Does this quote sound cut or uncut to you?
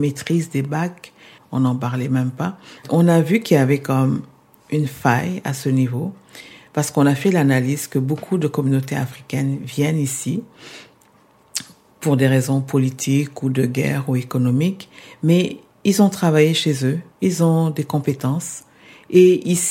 cut